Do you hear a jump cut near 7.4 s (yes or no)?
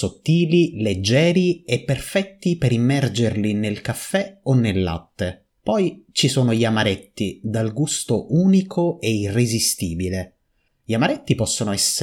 no